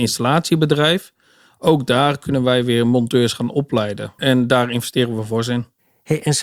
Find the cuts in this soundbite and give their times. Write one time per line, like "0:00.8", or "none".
0:04.2